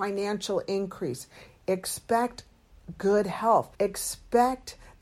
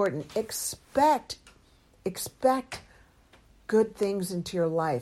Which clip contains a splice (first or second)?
first